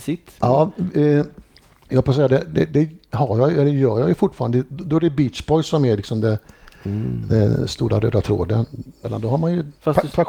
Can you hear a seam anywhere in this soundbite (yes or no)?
yes